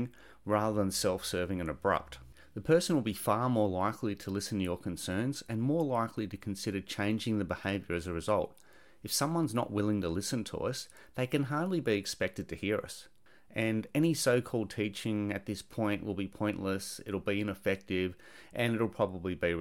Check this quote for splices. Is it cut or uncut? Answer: uncut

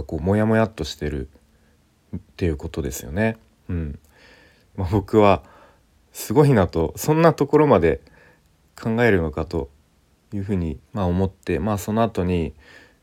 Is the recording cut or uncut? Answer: cut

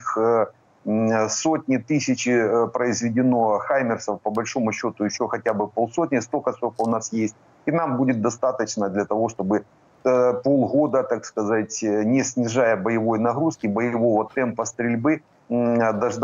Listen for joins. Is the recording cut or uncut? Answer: cut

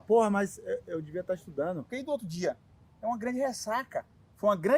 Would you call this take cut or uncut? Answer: cut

